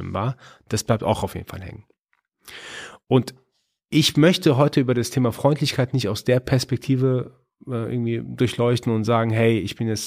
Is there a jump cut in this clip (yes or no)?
no